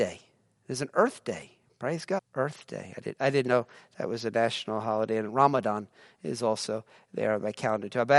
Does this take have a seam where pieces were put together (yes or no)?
yes